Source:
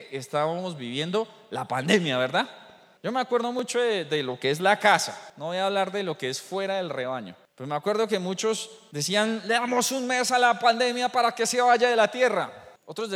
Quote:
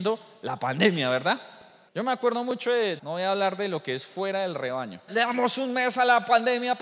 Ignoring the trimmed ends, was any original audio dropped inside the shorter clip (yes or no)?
yes